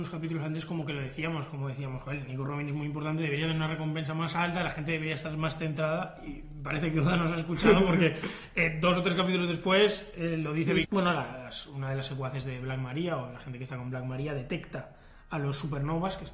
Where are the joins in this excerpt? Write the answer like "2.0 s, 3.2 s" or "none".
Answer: 10.8 s